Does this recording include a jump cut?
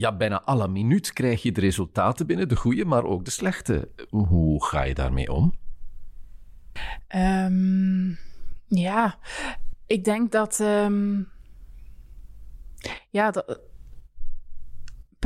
no; 0 cuts

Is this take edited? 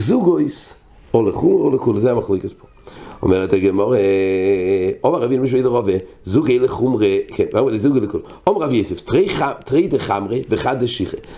yes; 1 cut; at 1.1 s

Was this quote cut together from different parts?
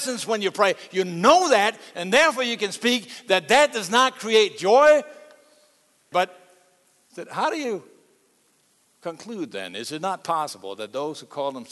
yes; 1 cut; at 6.1 s

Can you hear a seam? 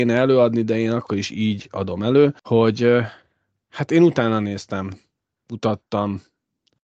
yes; 2 cuts; at 2.4 s, 5.3 s

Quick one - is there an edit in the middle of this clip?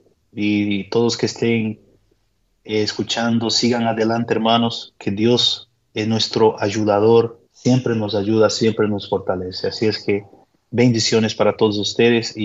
yes; 1 cut; at 7.4 s

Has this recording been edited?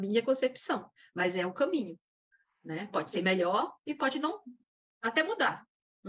no; 0 cuts

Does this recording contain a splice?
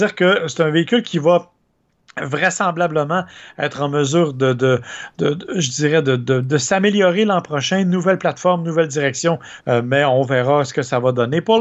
yes; 1 cut; at 9.6 s

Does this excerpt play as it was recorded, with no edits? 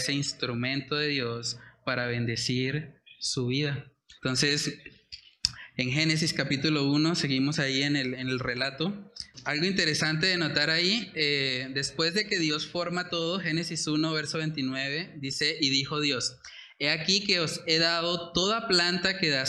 no; 1 cut; at 4.1 s

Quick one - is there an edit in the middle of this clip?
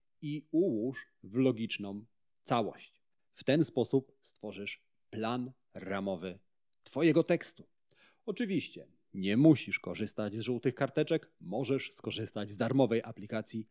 no; 0 cuts

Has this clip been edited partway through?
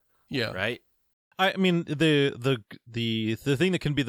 no; 0 cuts

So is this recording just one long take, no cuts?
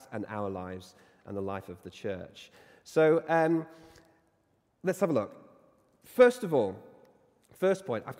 yes; 0 cuts

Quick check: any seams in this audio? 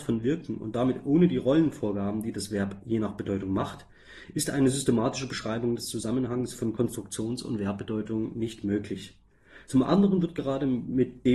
no; 0 cuts

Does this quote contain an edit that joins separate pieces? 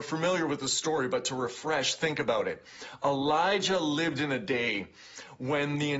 no; 0 cuts

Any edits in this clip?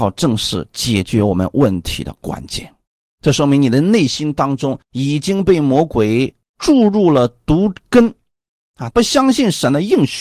yes; 2 cuts; at 4.8 s, 8.9 s

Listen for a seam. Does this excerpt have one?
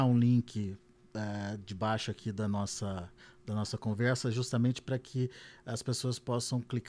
no; 0 cuts

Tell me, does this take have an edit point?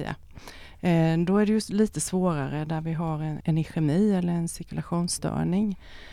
yes; 1 cut; at 3.4 s

